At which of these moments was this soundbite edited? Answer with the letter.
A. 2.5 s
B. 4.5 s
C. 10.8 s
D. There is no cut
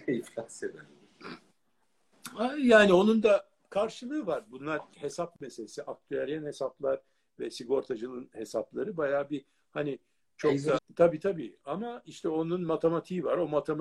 C